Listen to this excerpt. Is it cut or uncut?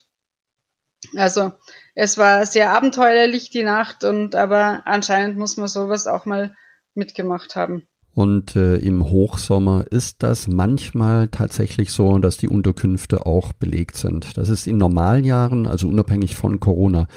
cut